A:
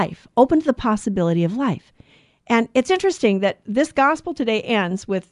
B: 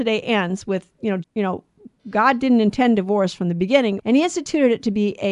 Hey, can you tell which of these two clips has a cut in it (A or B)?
B